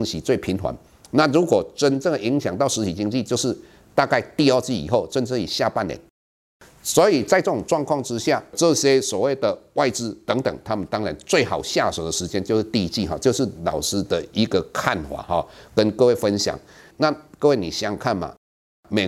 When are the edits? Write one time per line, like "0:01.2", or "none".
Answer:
0:16.9